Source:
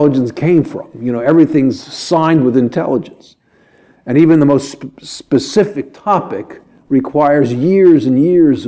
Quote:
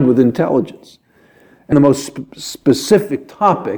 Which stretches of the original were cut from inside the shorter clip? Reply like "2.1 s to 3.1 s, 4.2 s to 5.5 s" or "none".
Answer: 4.1 s to 4.4 s

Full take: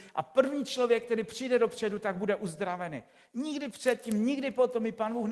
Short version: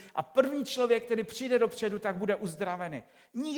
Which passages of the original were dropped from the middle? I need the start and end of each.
none

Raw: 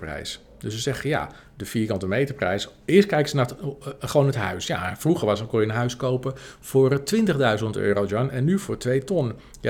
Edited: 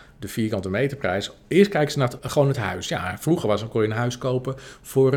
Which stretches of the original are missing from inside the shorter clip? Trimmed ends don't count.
3.6 s to 4.0 s

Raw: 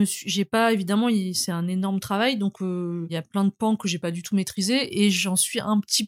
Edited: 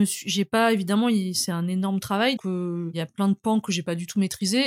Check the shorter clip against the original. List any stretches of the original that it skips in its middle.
2.4 s to 2.5 s

